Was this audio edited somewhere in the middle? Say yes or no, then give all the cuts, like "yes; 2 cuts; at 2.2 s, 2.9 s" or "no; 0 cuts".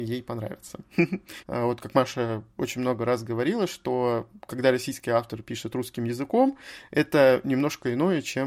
yes; 1 cut; at 1.4 s